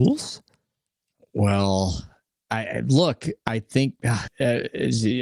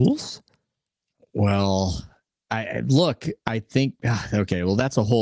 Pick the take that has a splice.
first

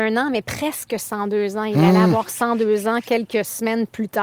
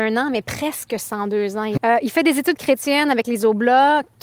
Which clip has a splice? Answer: second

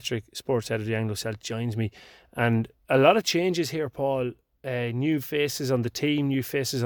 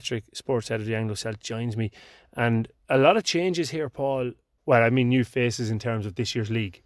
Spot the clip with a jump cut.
second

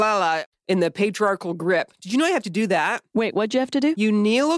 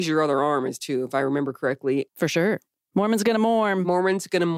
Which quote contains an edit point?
second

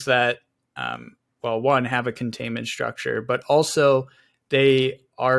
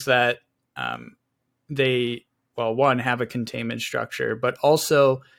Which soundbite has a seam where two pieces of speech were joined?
first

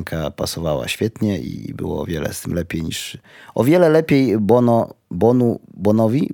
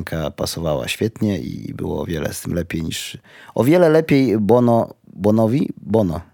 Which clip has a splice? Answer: second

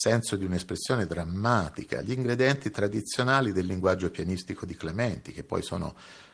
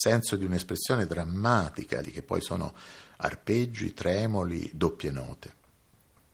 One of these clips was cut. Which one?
second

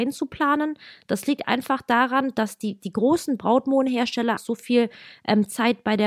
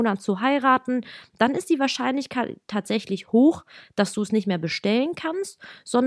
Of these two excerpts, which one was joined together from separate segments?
first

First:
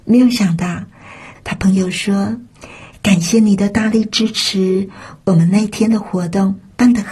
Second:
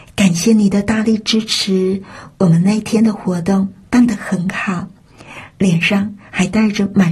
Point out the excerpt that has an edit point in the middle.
first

